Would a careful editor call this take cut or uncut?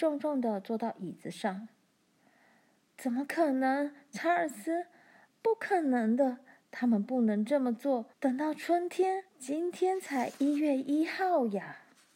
cut